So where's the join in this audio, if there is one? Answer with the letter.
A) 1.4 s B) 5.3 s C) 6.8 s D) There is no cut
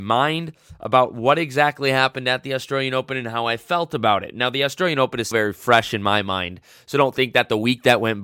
B